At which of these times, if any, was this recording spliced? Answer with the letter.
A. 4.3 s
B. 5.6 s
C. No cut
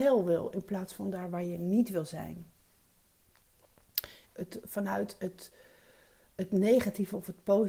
A